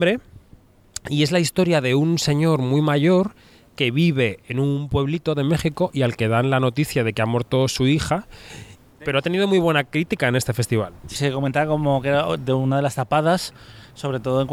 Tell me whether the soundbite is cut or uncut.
cut